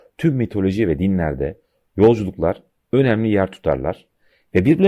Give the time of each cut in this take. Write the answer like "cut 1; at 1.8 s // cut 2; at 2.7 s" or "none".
none